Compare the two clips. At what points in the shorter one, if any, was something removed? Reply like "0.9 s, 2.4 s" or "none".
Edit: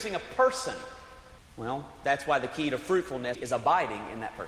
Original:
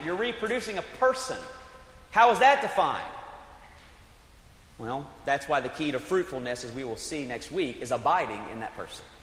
1.4 s, 3.3 s

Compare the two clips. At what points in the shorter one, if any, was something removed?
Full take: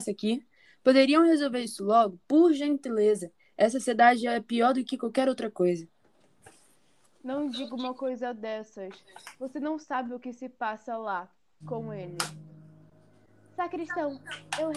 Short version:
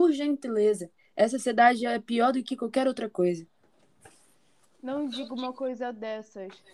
none

